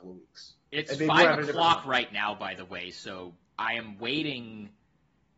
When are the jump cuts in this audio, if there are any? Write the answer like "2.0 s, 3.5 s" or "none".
3.4 s